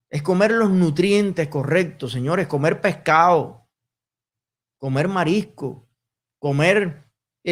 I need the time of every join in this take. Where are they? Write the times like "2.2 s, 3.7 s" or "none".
none